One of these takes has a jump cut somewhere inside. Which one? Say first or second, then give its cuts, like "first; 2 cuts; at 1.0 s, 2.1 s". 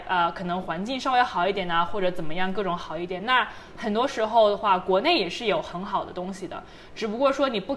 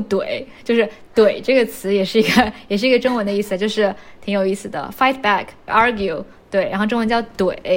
second; 1 cut; at 5.7 s